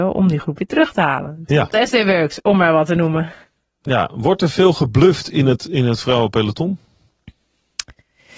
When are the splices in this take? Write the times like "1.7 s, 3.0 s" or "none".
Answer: 1.7 s